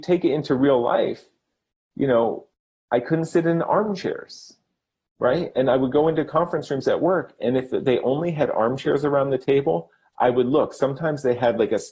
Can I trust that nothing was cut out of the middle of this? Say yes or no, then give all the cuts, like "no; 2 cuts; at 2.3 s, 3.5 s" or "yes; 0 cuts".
yes; 0 cuts